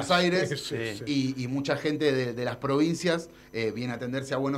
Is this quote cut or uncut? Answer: uncut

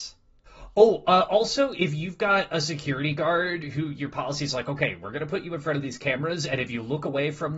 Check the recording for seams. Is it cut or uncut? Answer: uncut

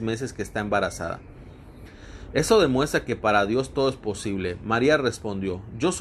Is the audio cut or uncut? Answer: uncut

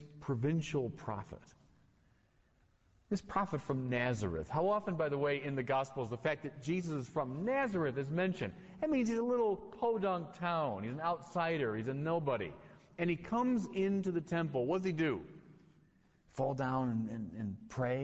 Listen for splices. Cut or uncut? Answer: uncut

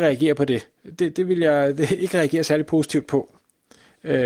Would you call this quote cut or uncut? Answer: uncut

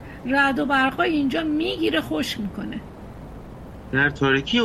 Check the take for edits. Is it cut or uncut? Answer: uncut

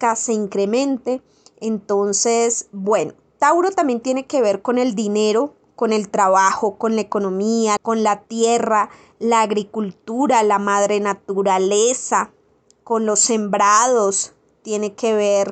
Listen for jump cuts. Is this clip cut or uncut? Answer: cut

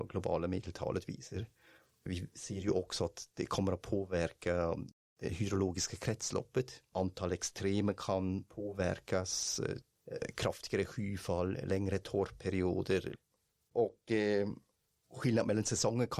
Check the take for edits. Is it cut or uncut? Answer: cut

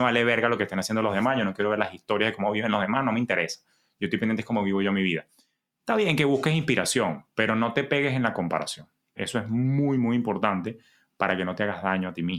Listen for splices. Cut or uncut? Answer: uncut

